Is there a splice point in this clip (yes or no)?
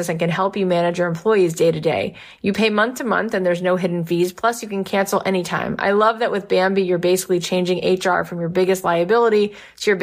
no